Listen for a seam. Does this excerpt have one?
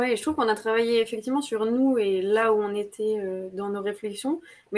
no; 0 cuts

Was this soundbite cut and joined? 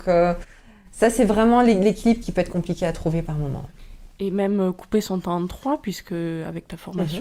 no; 0 cuts

